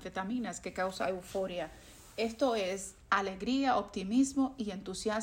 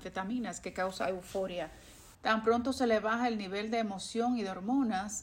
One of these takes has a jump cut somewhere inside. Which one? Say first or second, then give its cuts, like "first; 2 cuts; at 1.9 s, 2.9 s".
second; 1 cut; at 2.1 s